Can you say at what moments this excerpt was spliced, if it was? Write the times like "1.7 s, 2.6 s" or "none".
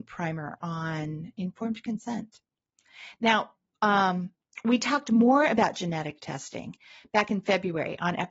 none